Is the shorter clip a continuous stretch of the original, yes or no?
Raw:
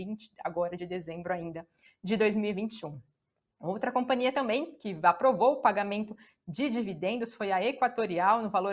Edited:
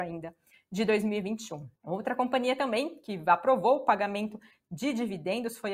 no